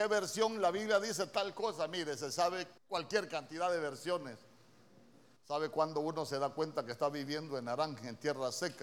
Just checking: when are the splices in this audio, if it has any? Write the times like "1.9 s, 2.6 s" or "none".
2.8 s, 5.4 s